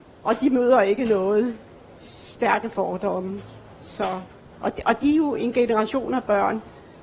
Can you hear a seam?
no; 0 cuts

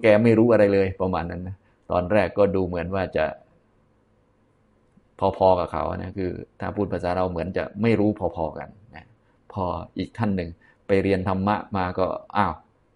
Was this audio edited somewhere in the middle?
no; 0 cuts

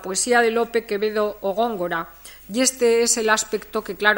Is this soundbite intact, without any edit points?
yes; 0 cuts

